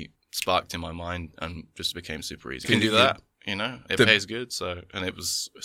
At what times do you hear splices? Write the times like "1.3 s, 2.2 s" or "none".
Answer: 2.6 s, 3.9 s